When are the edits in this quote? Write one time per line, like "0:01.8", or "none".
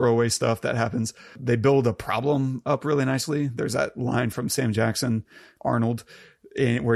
none